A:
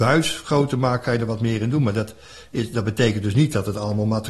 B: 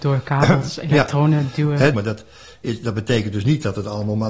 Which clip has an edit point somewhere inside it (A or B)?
B